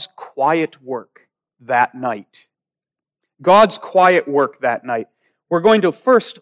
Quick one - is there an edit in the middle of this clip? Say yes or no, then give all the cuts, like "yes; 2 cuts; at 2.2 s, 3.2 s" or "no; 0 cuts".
no; 0 cuts